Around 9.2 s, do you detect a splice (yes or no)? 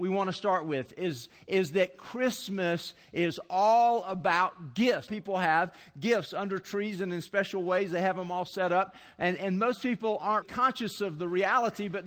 no